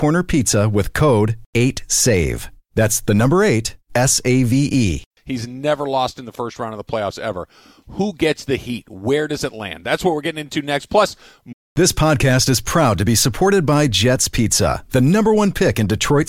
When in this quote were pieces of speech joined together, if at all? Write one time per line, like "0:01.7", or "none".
0:05.2